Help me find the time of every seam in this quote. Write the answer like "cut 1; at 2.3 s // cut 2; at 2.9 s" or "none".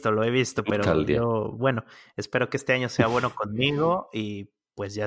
none